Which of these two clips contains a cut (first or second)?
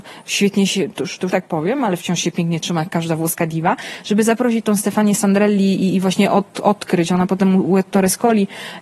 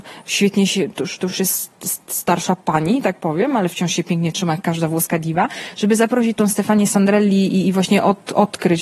first